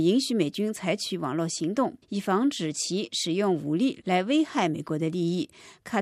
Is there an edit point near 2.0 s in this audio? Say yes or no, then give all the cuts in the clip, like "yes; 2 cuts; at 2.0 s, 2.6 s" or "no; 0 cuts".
yes; 1 cut; at 2.0 s